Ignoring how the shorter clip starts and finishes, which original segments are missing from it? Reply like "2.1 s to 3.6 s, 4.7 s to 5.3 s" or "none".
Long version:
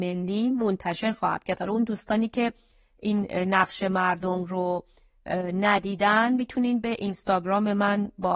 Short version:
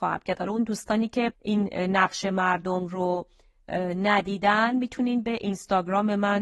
2.5 s to 2.9 s